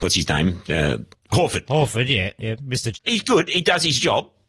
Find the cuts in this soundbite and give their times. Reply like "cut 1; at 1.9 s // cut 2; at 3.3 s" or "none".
cut 1; at 1.7 s // cut 2; at 2.9 s